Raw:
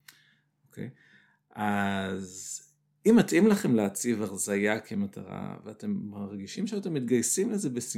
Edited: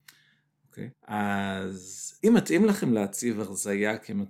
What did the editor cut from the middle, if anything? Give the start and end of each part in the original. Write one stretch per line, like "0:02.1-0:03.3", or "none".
0:00.9-0:01.4
0:02.6-0:03.0

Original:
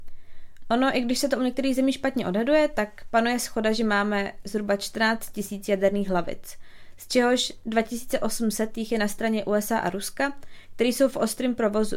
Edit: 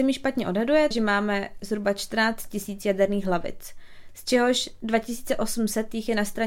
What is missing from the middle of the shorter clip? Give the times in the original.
0:02.7-0:03.7

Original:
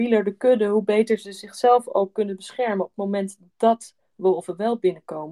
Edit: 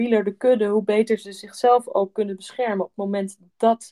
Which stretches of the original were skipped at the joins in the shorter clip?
none

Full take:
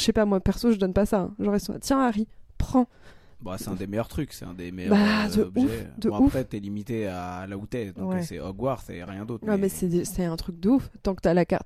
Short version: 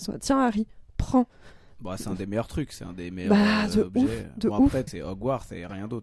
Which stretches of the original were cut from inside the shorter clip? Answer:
0:06.5-0:08.2

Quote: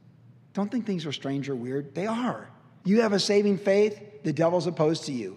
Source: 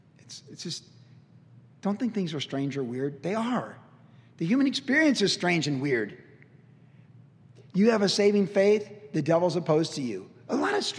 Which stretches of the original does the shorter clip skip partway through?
0:04.1-0:07.7

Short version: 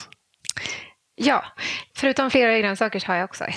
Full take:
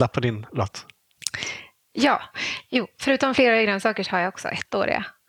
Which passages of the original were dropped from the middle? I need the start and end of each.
0:02.7-0:02.9

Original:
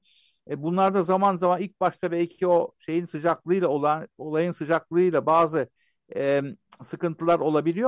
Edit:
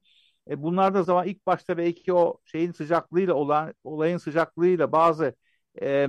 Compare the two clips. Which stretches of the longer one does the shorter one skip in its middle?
0:01.0-0:01.4

